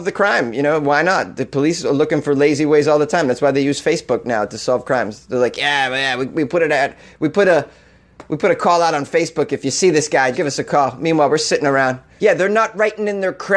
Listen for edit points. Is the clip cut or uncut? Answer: cut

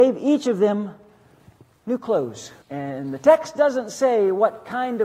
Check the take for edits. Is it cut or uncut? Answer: cut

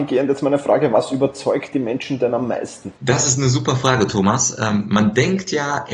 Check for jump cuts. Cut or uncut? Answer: cut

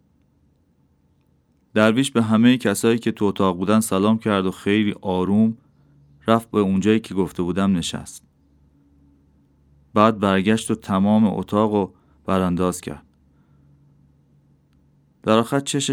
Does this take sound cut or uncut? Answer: uncut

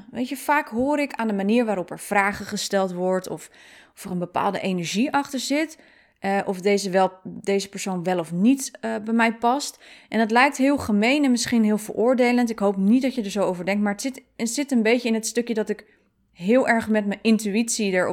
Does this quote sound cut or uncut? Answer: uncut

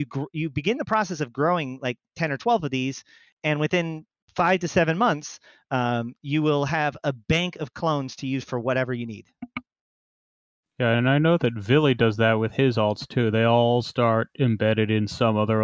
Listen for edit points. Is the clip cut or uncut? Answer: uncut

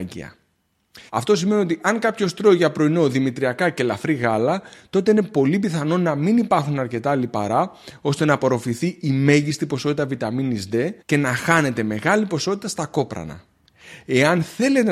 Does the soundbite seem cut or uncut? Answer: cut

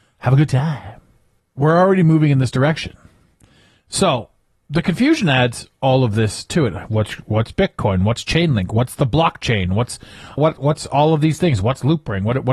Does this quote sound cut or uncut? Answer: cut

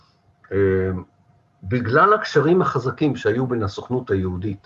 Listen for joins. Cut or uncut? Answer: uncut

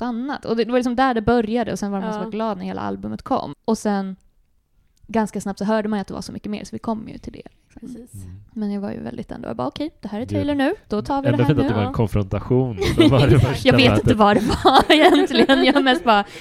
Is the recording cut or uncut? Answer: cut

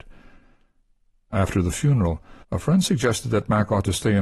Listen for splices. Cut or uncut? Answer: cut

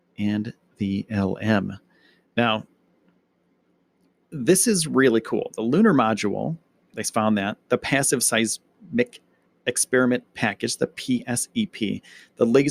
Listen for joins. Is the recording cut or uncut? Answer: uncut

